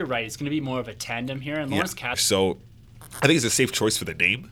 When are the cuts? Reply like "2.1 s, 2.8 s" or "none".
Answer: 2.1 s